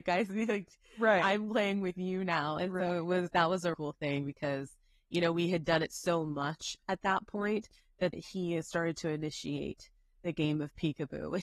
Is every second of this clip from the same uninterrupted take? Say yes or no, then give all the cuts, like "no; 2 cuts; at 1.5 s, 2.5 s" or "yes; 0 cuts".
no; 2 cuts; at 3.7 s, 8.1 s